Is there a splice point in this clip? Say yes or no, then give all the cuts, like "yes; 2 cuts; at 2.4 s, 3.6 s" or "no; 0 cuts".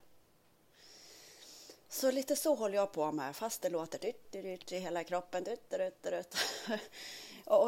yes; 1 cut; at 4.3 s